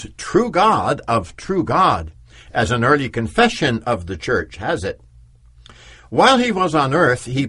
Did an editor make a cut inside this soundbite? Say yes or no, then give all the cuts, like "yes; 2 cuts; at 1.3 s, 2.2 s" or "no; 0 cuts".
no; 0 cuts